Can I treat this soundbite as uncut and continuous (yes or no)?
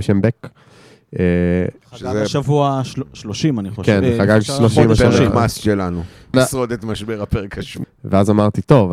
no